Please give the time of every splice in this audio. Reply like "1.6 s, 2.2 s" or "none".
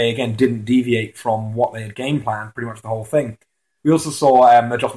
none